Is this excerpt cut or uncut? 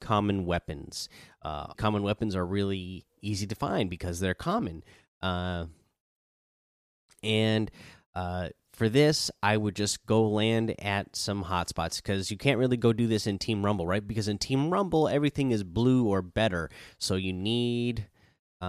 cut